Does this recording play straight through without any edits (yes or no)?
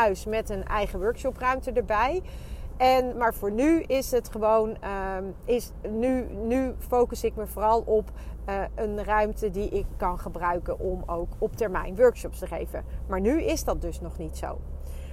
no